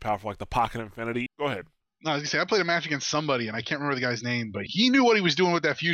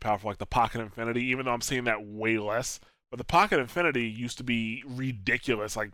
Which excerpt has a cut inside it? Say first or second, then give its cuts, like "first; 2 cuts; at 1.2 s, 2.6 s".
first; 2 cuts; at 1.3 s, 4.7 s